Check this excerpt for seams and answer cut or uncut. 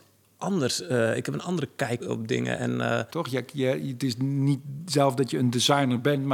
cut